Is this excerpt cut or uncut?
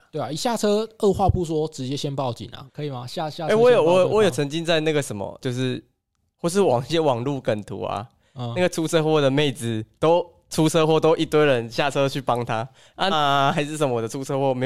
cut